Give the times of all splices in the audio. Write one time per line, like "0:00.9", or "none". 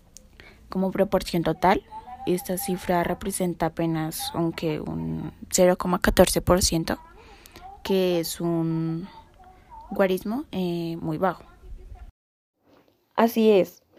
none